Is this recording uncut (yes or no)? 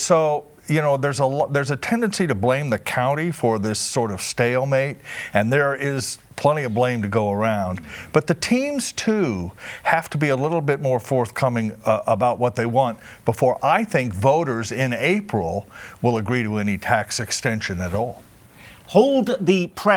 yes